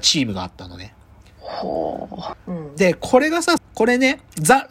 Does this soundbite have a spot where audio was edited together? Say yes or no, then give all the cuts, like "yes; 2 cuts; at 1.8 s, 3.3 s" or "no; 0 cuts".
yes; 2 cuts; at 2.3 s, 3.6 s